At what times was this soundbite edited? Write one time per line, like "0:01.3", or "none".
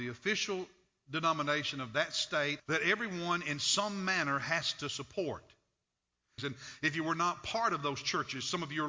0:02.6
0:06.4